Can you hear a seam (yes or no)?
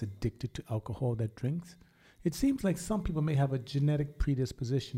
no